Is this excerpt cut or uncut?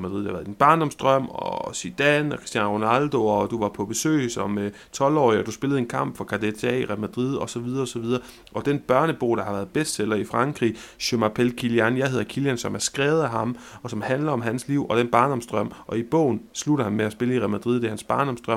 uncut